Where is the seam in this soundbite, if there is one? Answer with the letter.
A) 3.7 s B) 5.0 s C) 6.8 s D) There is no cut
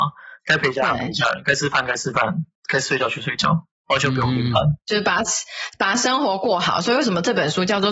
D